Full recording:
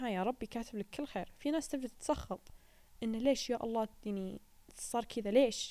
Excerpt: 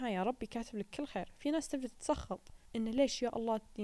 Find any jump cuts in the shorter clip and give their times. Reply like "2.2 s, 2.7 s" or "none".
2.7 s